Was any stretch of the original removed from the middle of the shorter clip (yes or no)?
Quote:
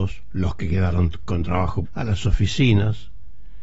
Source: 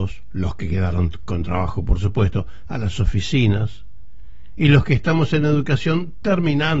yes